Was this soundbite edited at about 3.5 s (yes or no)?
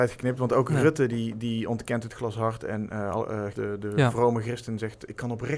yes